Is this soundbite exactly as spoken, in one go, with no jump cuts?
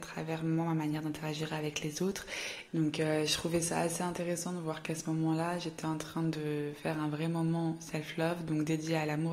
no; 1 cut; at 2.7 s

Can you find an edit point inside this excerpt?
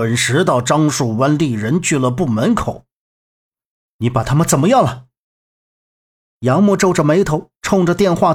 yes; 1 cut; at 3.9 s

